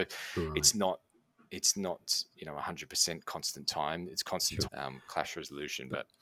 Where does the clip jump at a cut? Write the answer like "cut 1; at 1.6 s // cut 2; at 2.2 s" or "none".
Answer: cut 1; at 4.6 s